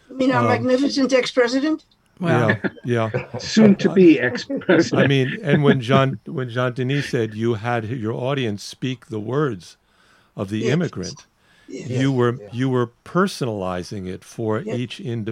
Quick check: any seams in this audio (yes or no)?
no